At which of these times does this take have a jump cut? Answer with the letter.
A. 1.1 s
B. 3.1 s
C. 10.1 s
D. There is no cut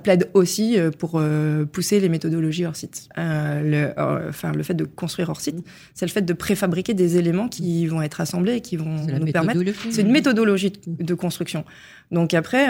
B